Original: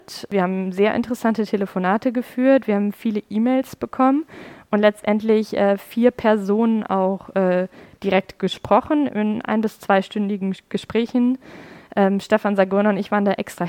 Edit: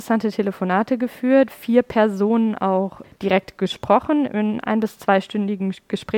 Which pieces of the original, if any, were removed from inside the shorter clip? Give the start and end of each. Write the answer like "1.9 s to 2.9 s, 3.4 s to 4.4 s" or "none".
2.6 s to 5.8 s, 7.3 s to 7.9 s